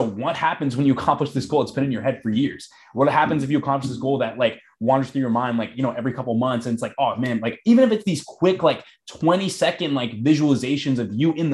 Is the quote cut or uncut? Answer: uncut